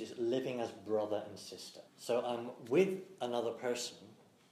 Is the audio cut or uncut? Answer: cut